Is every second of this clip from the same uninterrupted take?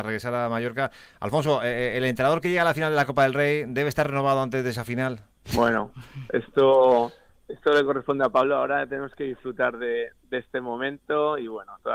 yes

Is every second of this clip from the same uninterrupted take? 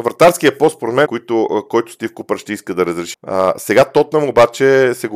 no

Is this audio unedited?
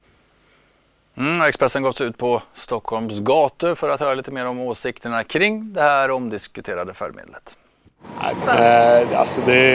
no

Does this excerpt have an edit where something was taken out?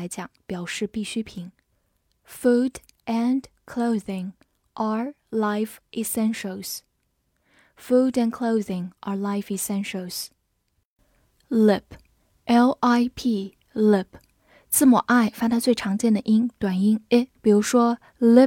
yes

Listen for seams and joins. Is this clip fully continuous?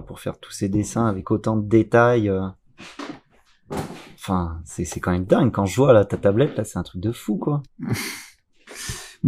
yes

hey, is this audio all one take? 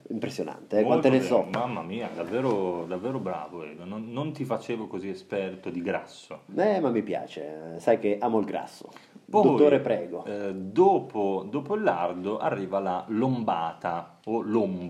yes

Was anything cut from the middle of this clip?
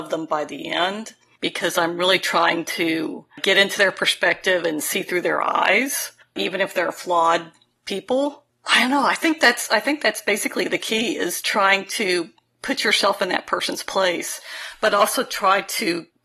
no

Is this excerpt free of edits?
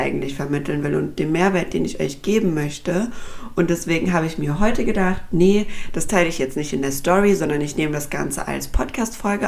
yes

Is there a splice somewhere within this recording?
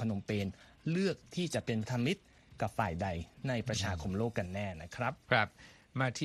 yes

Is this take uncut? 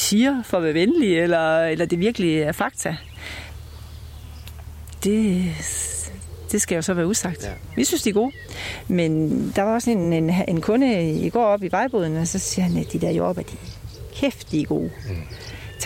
yes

